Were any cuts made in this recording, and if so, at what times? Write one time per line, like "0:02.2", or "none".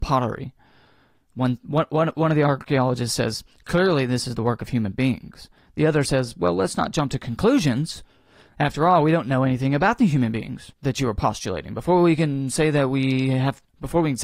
0:10.7